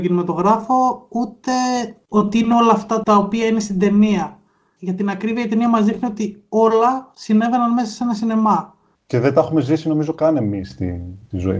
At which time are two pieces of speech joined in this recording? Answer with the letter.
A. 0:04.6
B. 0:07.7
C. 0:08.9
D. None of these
C